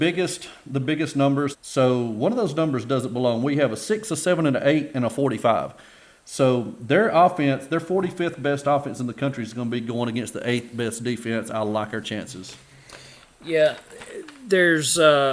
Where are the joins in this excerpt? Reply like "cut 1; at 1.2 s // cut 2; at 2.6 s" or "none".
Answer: cut 1; at 1.5 s